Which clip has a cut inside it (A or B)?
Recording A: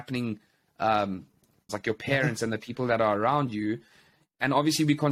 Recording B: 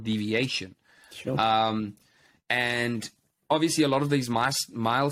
A